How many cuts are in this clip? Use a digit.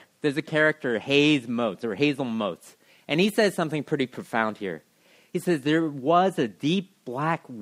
0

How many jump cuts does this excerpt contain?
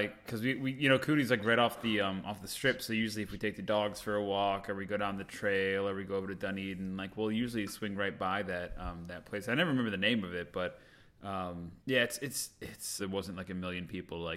2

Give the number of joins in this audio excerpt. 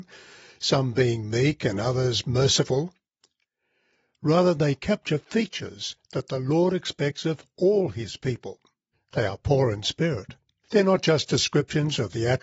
2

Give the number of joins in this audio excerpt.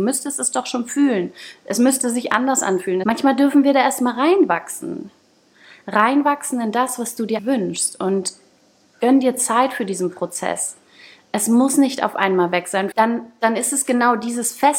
3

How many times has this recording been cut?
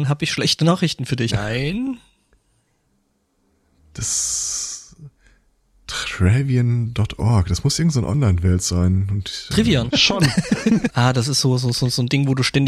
3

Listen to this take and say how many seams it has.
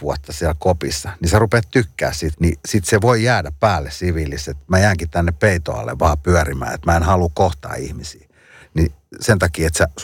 1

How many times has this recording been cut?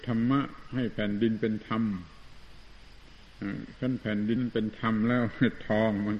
1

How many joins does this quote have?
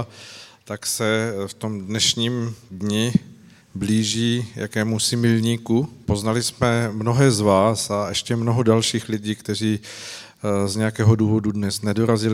1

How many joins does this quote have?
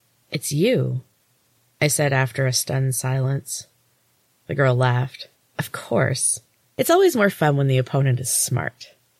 1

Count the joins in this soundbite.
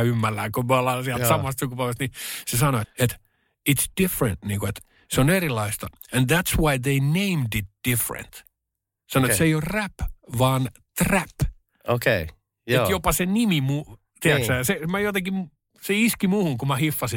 1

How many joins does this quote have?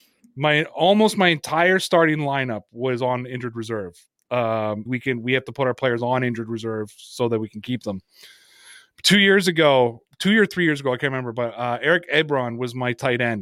1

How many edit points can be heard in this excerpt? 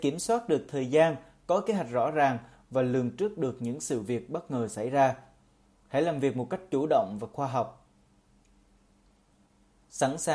0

